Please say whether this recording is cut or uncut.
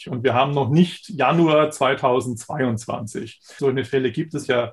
cut